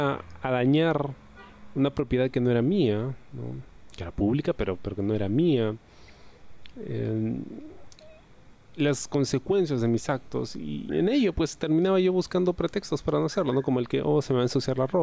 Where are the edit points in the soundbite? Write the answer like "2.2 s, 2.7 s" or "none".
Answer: 10.9 s